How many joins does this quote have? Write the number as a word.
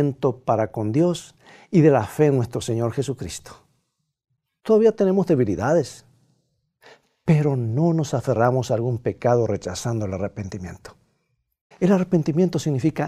two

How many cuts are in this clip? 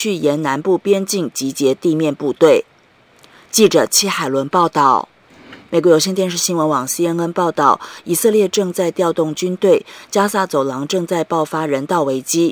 one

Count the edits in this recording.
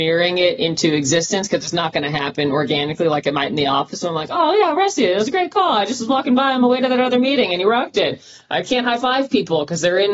zero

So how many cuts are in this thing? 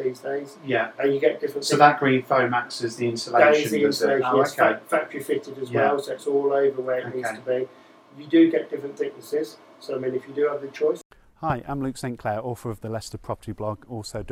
zero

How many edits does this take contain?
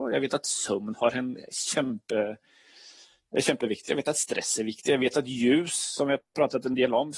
zero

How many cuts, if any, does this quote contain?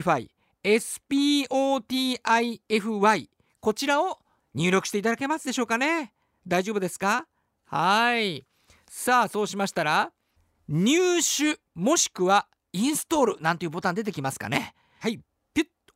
one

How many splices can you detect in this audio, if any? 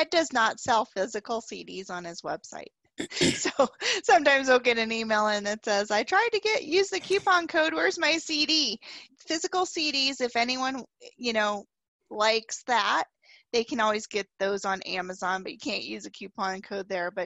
one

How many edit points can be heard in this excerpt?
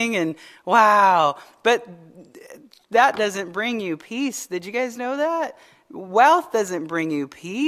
zero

